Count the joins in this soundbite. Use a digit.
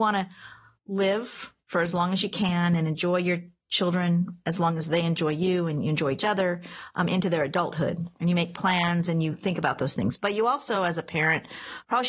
0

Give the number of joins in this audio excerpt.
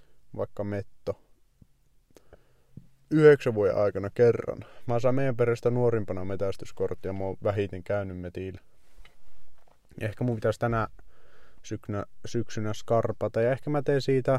0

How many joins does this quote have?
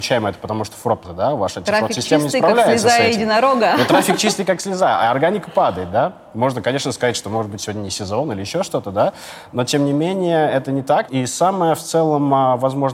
2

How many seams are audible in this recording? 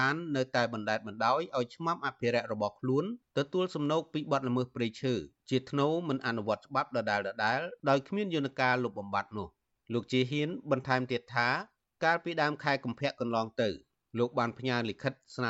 0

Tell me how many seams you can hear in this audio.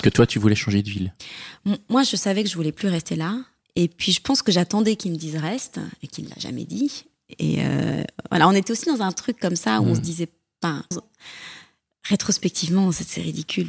1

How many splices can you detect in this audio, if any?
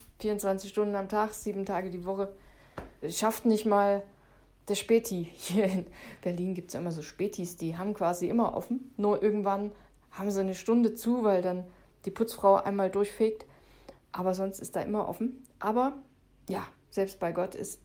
1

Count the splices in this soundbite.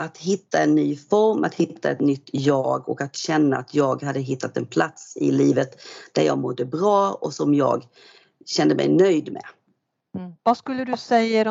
1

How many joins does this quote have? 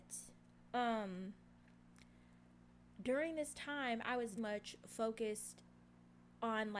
1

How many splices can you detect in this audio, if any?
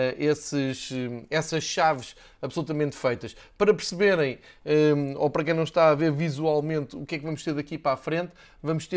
0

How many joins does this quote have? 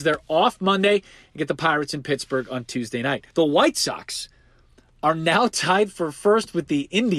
1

